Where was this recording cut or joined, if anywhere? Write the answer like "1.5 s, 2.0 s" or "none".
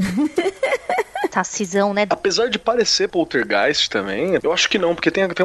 2.1 s, 4.4 s